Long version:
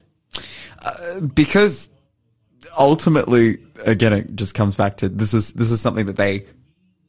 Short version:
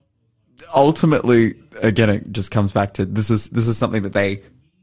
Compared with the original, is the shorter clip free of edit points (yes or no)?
yes